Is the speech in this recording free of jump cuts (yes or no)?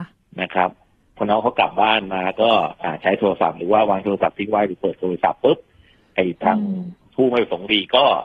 yes